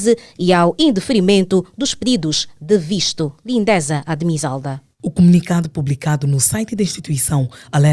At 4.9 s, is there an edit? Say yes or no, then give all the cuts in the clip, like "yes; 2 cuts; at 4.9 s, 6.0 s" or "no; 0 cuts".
yes; 1 cut; at 4.9 s